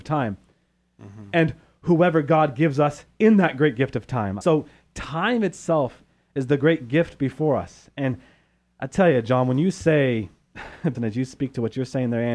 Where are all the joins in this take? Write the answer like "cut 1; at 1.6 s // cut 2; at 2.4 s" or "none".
cut 1; at 4.4 s // cut 2; at 10.9 s